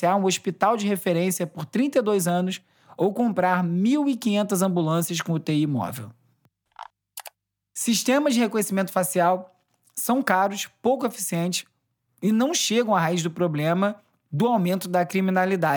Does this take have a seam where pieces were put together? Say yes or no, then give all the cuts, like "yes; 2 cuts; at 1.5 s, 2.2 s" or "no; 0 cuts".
no; 0 cuts